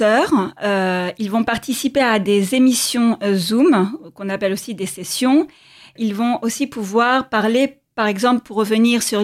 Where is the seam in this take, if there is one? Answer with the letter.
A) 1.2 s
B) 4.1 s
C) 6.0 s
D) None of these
C